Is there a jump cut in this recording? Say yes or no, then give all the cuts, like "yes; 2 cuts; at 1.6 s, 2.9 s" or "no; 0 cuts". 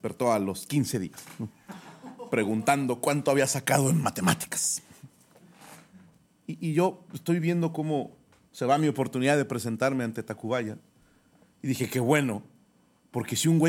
no; 0 cuts